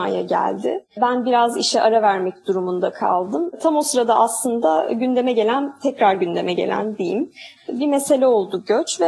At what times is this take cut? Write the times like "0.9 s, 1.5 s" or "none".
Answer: 7.6 s